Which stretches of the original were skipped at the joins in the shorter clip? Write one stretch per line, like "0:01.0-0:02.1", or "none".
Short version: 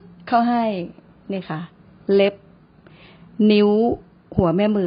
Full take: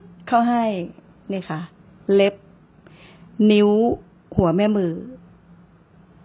none